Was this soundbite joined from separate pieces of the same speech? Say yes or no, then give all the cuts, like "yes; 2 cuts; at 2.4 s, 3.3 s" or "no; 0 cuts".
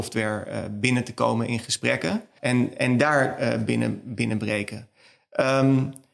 yes; 1 cut; at 2.4 s